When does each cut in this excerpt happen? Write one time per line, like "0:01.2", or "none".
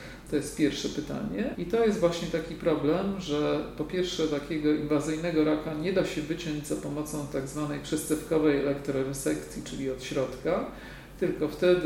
0:01.5